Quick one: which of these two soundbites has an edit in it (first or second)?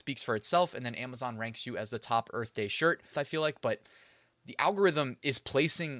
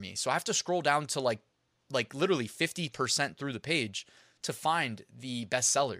first